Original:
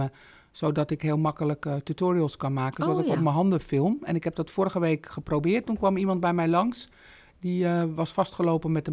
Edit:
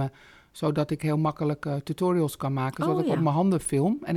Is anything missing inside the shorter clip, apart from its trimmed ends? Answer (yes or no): no